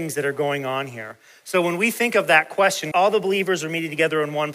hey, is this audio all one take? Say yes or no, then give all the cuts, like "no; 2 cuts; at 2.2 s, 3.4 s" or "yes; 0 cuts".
no; 1 cut; at 2.9 s